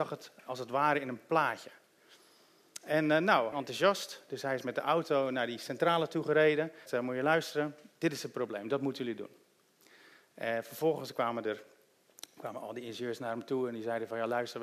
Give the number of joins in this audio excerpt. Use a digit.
2